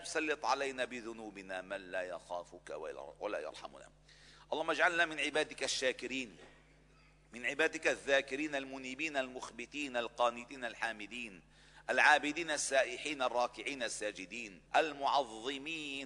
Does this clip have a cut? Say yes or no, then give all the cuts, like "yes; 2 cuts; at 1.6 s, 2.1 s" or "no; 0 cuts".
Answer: yes; 1 cut; at 14.7 s